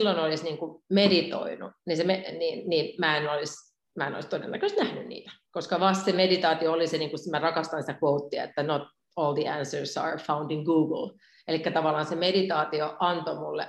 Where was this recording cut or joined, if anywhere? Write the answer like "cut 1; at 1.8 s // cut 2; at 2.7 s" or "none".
cut 1; at 3.8 s